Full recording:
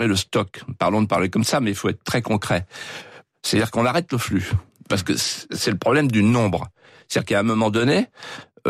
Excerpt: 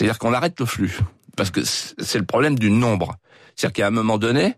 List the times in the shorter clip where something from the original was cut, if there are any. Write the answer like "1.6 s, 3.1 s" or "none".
none